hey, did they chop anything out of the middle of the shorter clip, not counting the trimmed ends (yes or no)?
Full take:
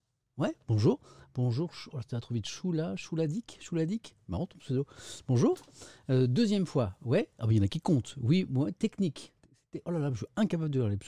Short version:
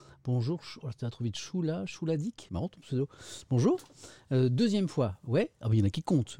yes